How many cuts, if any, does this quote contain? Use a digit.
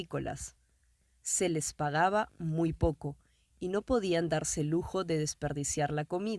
0